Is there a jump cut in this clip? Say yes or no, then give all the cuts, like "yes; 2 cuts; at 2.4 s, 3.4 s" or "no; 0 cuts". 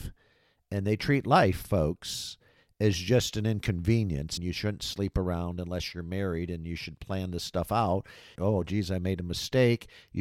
yes; 2 cuts; at 4.4 s, 8.4 s